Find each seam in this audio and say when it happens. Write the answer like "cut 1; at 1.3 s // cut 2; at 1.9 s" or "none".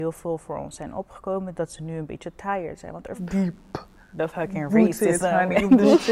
cut 1; at 3.2 s